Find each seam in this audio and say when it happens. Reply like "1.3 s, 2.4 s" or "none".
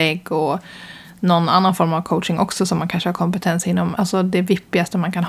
none